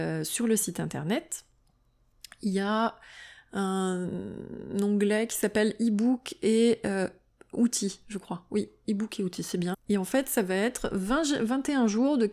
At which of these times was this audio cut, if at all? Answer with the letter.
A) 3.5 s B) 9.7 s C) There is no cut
B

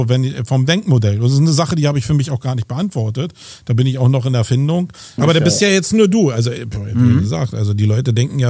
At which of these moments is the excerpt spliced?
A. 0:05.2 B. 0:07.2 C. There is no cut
A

